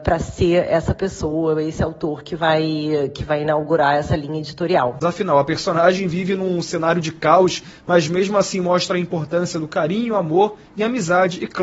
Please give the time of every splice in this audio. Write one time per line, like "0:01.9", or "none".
0:05.0